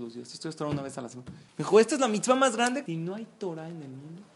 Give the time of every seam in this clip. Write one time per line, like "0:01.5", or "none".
0:01.5
0:02.9